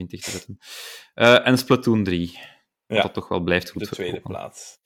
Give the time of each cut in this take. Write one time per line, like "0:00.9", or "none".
none